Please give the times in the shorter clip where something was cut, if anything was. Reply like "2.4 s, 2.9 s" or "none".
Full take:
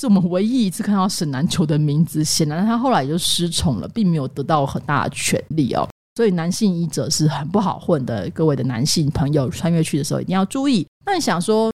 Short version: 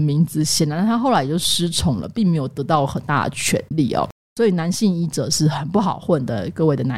none